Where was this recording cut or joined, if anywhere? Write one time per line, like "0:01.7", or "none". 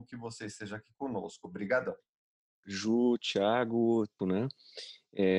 0:02.6
0:04.2